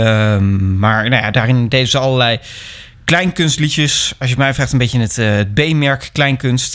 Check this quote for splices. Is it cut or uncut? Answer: uncut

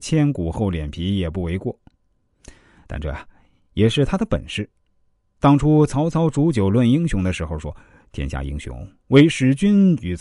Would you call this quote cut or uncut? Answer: uncut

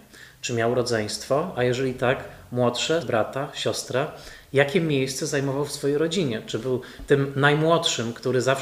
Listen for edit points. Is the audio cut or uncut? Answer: cut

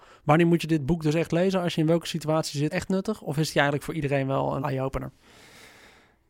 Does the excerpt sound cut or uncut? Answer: cut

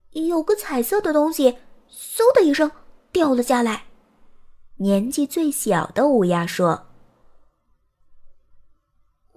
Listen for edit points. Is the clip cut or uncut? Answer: cut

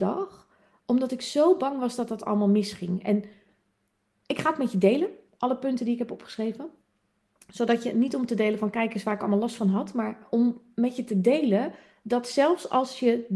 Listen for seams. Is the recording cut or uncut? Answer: uncut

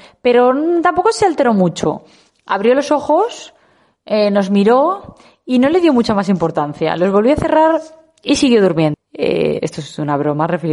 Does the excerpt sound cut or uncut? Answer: cut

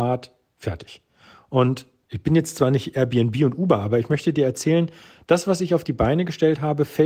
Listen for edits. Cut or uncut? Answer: uncut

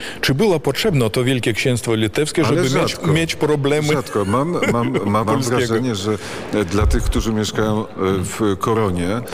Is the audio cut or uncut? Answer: cut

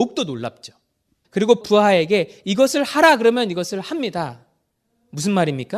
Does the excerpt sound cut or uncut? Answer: cut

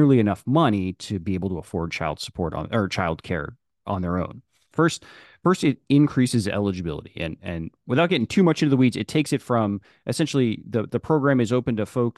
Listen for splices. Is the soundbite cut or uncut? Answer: cut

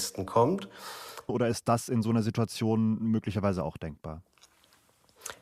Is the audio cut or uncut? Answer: cut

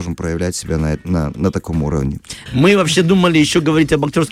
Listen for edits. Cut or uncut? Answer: cut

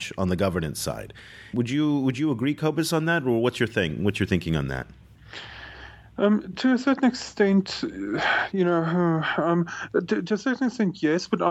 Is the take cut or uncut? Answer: cut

